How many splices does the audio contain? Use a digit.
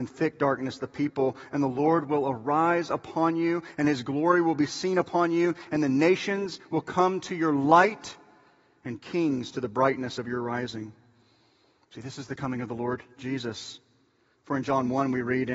0